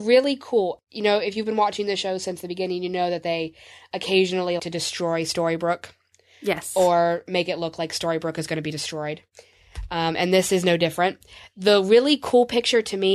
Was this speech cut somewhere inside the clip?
yes; 1 cut; at 4.6 s

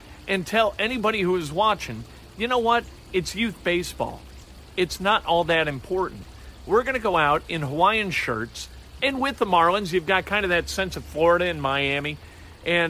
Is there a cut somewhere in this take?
yes; 2 cuts; at 6.6 s, 9.0 s

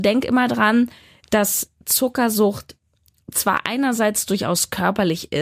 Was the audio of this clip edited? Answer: no; 0 cuts

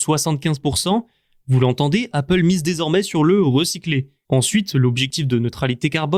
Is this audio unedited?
no; 1 cut; at 4.2 s

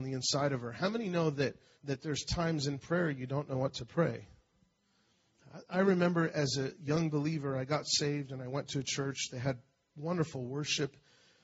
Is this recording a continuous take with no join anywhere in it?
no; 1 cut; at 1.7 s

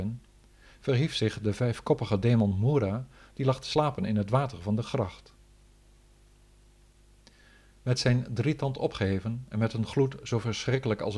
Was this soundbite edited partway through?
no; 0 cuts

